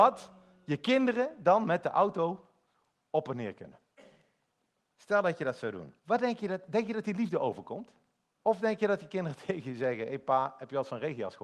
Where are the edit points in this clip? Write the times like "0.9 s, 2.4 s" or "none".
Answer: 6.0 s, 8.3 s